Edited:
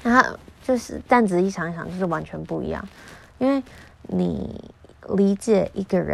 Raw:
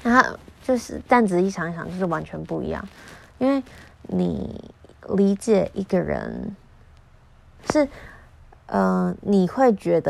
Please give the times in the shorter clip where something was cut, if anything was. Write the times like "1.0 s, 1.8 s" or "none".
none